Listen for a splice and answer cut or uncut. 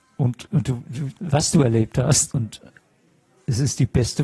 cut